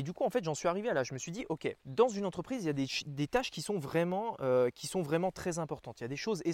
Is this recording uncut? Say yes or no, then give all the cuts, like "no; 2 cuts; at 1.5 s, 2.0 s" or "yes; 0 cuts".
no; 1 cut; at 1.8 s